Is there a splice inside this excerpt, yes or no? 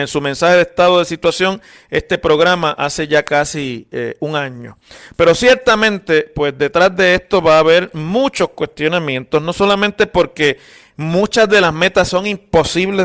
no